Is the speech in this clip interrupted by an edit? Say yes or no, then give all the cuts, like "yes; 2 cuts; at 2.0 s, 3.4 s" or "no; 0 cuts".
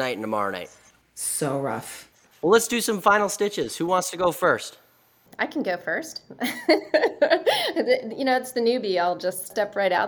no; 0 cuts